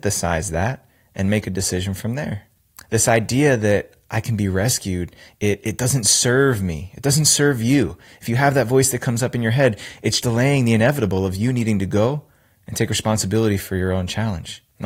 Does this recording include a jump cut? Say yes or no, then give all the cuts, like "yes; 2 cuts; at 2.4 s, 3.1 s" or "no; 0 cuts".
yes; 1 cut; at 10.2 s